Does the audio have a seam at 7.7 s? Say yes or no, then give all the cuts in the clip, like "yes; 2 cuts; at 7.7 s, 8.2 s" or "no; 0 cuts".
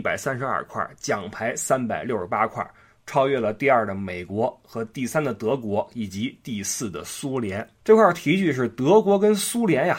yes; 1 cut; at 7.7 s